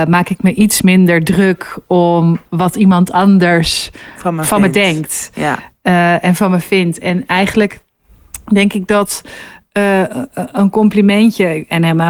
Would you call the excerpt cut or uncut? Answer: uncut